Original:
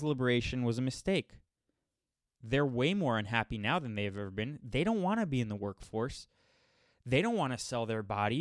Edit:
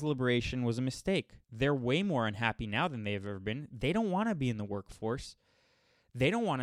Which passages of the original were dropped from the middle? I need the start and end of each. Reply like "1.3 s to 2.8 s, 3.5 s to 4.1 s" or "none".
1.4 s to 2.4 s